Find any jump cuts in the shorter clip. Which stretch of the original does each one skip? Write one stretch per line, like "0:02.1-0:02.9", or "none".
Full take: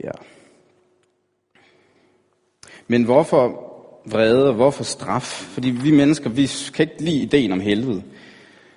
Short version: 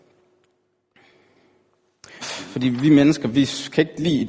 0:02.8-0:05.2